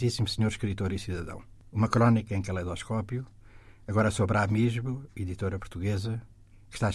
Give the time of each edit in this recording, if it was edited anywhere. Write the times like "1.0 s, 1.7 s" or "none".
none